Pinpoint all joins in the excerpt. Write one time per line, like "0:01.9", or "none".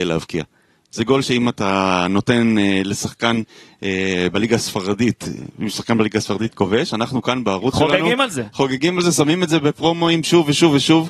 none